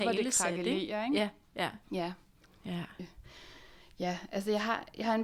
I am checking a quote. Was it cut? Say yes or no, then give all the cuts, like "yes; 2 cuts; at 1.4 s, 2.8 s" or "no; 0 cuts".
yes; 2 cuts; at 1.8 s, 3.0 s